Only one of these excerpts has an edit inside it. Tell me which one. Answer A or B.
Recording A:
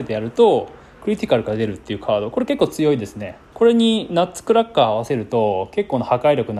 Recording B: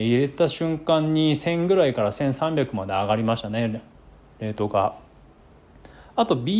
A